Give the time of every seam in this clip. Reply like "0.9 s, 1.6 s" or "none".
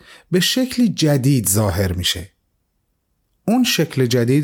none